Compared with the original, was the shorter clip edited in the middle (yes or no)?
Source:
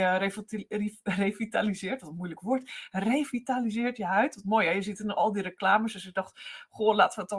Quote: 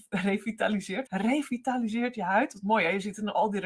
yes